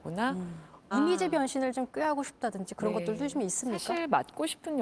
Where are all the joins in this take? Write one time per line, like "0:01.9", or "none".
0:00.9